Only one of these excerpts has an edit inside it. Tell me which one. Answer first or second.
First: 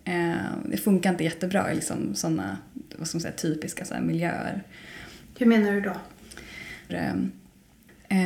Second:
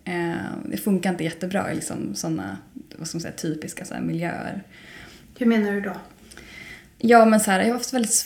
first